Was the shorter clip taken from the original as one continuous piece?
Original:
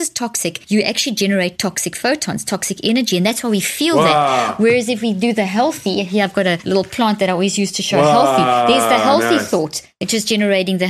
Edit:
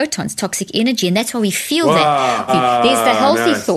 no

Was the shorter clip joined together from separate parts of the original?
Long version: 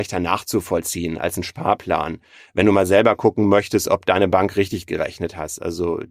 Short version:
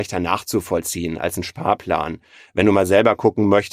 no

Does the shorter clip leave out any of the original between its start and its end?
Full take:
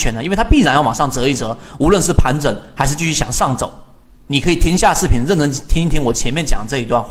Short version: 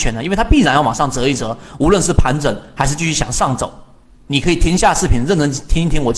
no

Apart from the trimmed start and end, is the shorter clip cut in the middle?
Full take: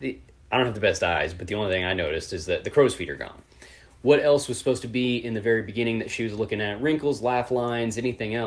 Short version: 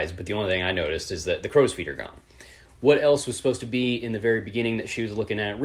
no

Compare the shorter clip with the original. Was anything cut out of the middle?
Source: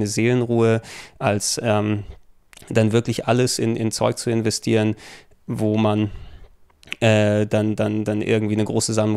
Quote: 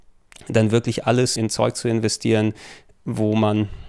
yes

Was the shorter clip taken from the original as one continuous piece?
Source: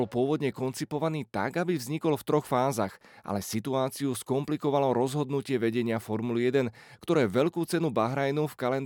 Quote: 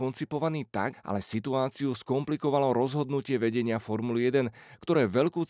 no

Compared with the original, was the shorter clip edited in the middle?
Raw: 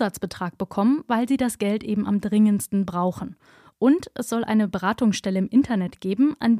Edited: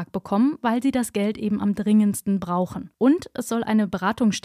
yes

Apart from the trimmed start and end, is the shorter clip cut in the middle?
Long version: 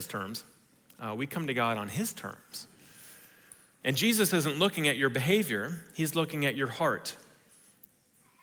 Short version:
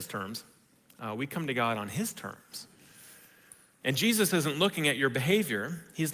no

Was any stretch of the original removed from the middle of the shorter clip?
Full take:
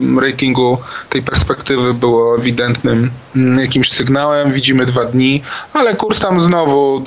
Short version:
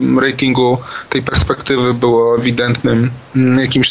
no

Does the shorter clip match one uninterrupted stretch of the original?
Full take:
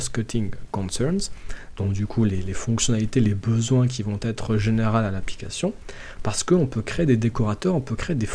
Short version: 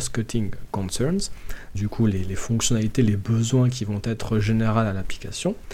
no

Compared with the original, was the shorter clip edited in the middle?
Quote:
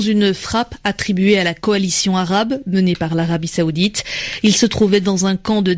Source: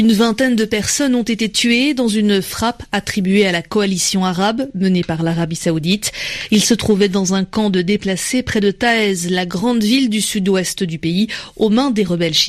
no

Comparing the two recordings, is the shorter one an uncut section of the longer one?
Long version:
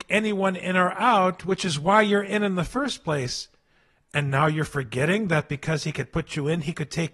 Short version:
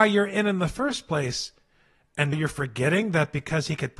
no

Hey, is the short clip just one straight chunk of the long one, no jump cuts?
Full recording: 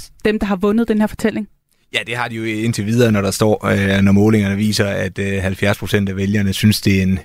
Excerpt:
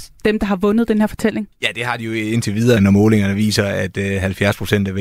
no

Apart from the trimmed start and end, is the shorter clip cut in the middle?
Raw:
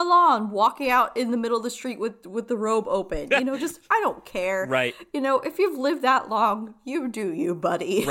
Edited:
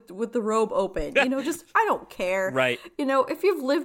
no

